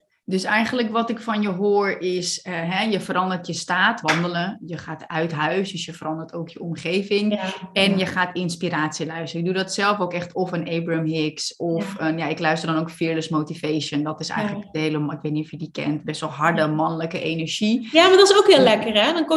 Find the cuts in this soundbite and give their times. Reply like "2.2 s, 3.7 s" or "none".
4.0 s